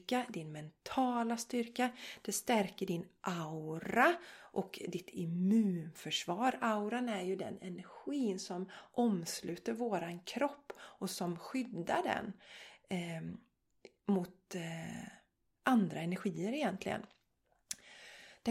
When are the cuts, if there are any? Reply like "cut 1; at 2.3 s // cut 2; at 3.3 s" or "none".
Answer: none

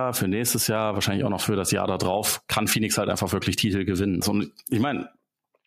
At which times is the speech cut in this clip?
cut 1; at 4.2 s

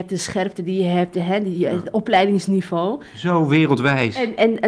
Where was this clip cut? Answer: none

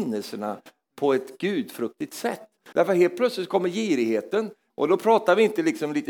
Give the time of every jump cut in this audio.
cut 1; at 2.7 s // cut 2; at 4.7 s

